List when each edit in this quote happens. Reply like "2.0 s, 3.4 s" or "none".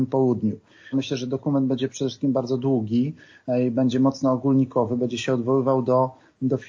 0.9 s